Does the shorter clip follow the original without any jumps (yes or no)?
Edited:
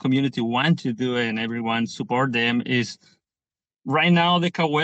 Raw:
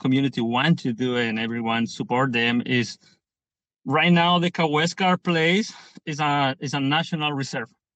yes